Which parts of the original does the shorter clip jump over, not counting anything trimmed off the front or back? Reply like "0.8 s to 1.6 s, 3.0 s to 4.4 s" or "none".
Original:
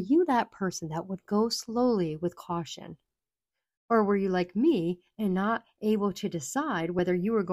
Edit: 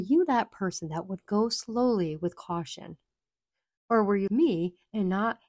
4.3 s to 4.5 s